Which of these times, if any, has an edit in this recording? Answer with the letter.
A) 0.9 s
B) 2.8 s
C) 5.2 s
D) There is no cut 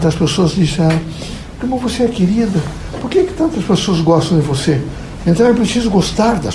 C